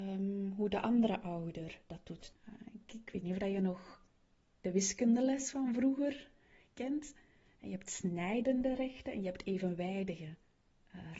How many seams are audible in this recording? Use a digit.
1